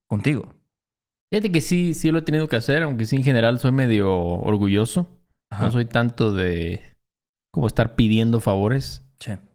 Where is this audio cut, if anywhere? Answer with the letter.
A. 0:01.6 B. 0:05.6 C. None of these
C